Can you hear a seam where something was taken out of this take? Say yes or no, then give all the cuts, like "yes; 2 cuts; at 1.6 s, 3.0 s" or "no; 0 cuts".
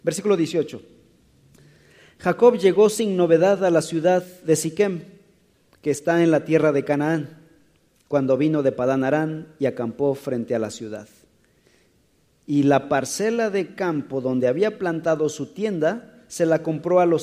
no; 0 cuts